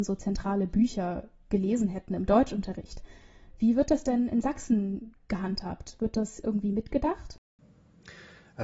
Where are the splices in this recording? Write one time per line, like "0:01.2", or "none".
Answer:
none